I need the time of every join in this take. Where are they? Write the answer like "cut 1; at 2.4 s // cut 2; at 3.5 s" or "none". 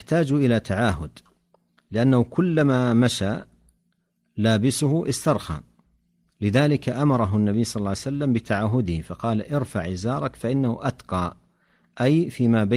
none